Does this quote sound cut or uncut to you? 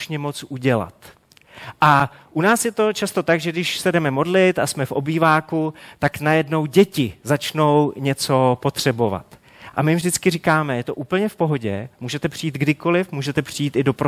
uncut